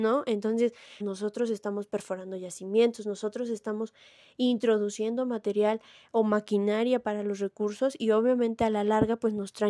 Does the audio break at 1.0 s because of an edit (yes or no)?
yes